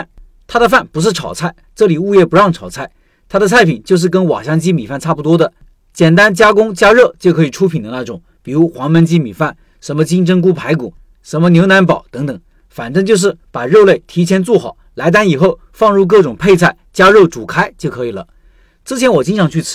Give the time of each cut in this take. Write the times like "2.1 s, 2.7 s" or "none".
none